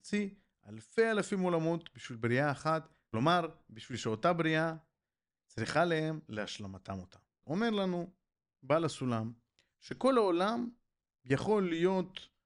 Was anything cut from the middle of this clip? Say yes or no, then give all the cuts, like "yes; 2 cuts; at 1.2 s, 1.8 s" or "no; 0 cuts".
yes; 1 cut; at 7.4 s